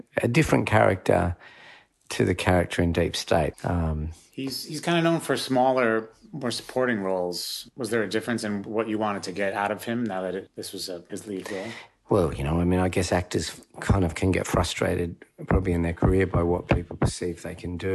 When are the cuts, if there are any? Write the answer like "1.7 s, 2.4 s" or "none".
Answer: 3.5 s